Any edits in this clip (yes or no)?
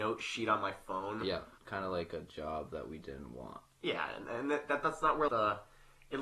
yes